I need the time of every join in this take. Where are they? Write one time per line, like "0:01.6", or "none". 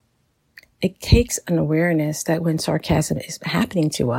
none